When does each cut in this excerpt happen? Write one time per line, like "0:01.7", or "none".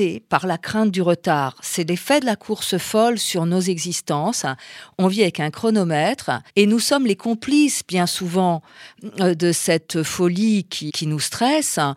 0:06.5
0:10.9